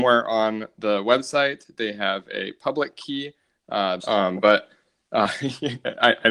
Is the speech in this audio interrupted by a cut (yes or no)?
yes